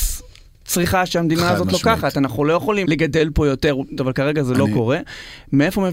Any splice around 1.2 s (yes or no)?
no